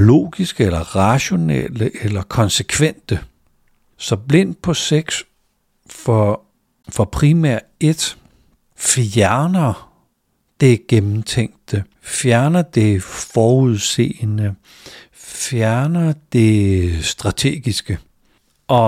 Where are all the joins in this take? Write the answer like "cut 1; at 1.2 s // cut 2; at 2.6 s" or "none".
none